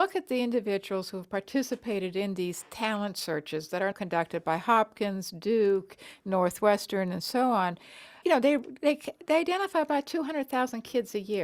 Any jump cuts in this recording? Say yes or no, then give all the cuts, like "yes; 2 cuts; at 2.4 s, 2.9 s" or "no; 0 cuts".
yes; 2 cuts; at 3.9 s, 8.2 s